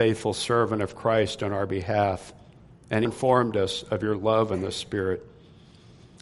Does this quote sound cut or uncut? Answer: cut